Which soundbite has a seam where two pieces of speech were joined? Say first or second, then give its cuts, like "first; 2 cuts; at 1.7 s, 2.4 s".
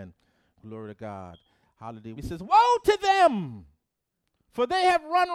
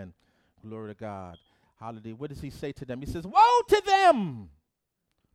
first; 1 cut; at 2.2 s